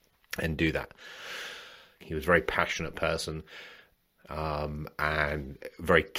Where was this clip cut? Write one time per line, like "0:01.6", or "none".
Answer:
0:02.0
0:04.1